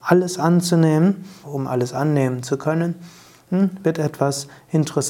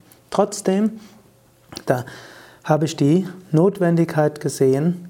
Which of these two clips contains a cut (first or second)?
first